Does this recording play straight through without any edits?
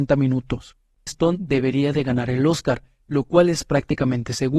no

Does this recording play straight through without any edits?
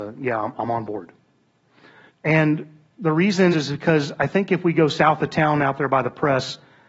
no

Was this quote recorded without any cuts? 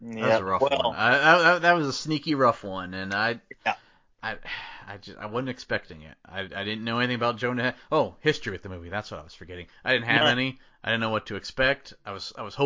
yes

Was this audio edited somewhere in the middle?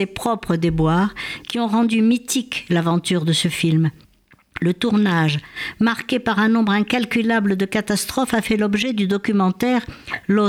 no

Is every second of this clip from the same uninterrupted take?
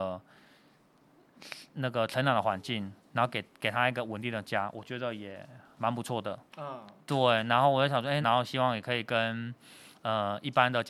no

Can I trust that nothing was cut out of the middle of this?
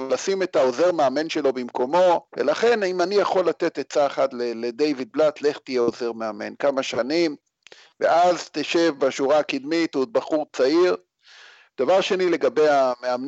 no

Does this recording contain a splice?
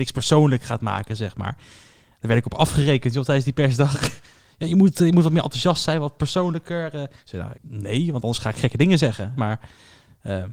yes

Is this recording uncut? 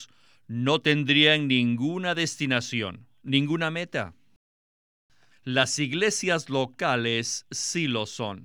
no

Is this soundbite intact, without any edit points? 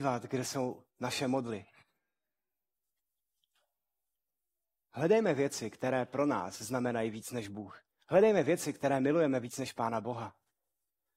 yes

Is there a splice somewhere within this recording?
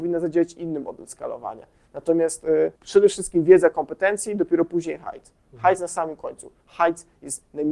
yes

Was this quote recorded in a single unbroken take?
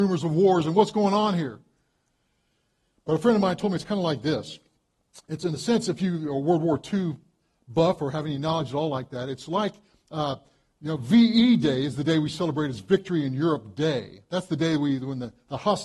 yes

